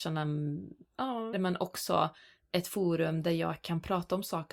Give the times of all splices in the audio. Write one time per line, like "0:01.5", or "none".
0:01.3